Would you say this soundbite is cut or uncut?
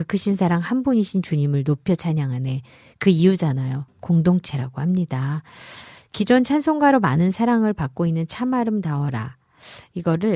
cut